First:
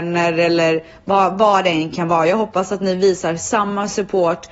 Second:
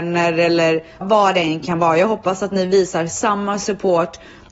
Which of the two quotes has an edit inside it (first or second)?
second